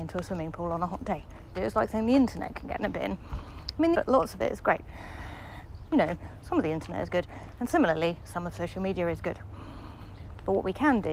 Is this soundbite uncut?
no; 3 cuts; at 1.5 s, 3.9 s, 5.9 s

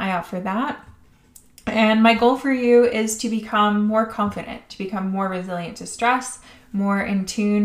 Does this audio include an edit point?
no; 0 cuts

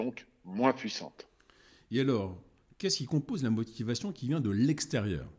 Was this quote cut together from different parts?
no; 0 cuts

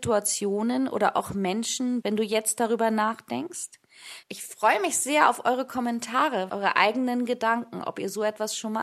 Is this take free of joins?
no; 3 cuts; at 2.0 s, 4.2 s, 6.5 s

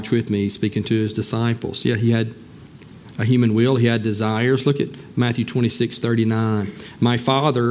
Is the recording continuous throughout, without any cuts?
yes; 0 cuts

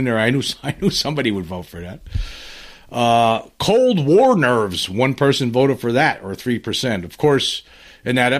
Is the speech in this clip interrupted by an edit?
no; 0 cuts

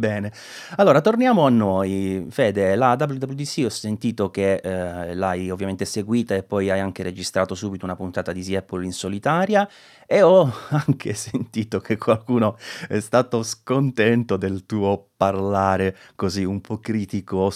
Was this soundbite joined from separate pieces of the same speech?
no; 0 cuts

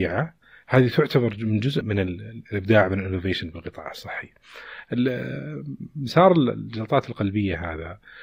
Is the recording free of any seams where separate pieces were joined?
no; 1 cut; at 1.8 s

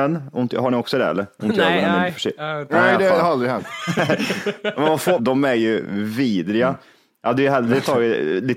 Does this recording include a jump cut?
yes; 1 cut; at 5.2 s

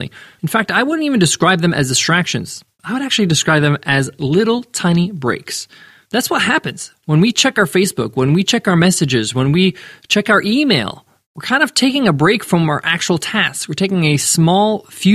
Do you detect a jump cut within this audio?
no; 0 cuts

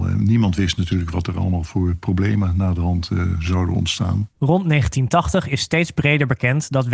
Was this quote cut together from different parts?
yes; 1 cut; at 4.3 s

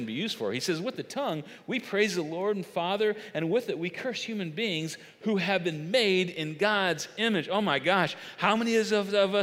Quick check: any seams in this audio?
no; 0 cuts

